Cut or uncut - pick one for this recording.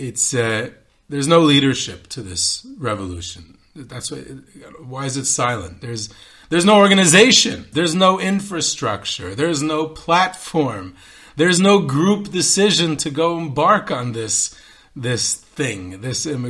cut